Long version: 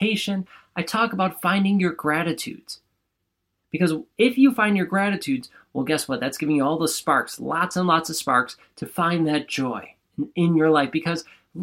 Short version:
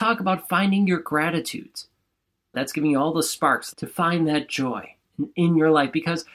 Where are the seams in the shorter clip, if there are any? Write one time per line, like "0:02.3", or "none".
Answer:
0:02.5
0:03.7